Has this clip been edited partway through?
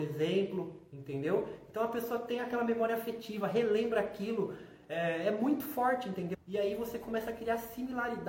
yes; 1 cut; at 6.3 s

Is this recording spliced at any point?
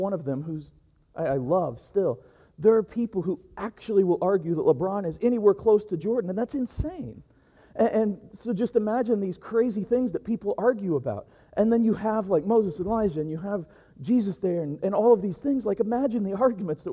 yes; 1 cut; at 7.6 s

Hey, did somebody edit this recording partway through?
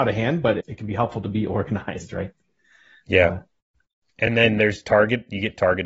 no; 0 cuts

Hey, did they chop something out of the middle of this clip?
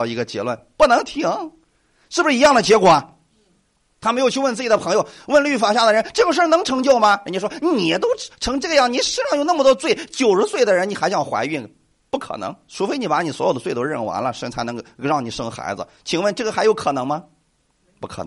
no; 0 cuts

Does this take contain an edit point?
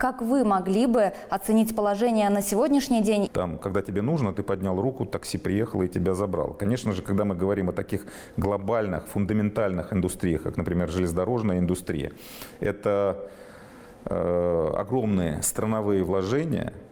yes; 1 cut; at 3.3 s

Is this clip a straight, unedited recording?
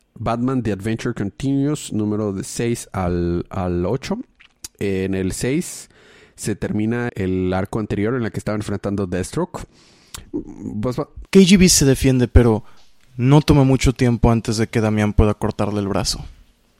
no; 2 cuts; at 7.1 s, 11.3 s

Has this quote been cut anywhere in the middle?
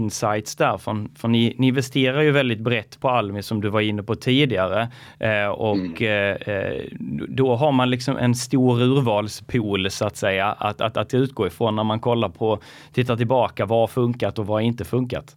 no; 0 cuts

